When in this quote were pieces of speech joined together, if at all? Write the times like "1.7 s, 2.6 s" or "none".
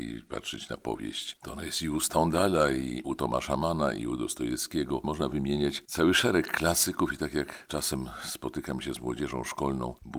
none